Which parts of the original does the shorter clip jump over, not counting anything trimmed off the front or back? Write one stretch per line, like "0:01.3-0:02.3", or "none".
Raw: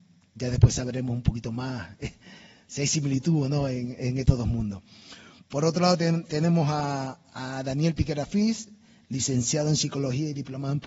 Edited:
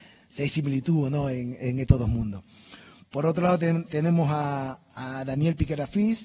none